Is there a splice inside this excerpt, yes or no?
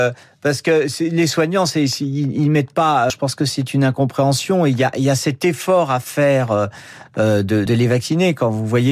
yes